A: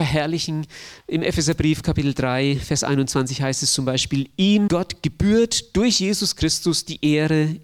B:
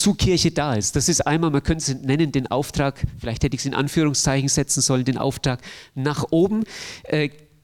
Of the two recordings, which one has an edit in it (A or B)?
A